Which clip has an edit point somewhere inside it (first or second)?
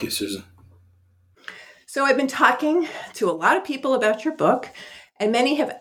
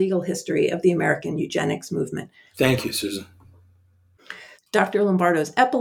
second